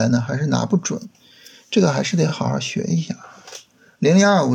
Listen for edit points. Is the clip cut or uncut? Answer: uncut